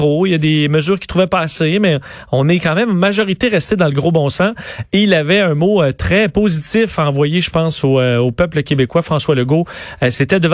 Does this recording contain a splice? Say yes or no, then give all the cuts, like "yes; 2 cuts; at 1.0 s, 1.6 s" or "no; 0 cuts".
no; 0 cuts